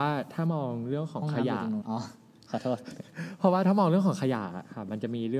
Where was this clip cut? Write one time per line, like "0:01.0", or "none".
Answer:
0:01.8